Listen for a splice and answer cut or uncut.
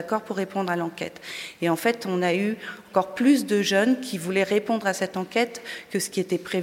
uncut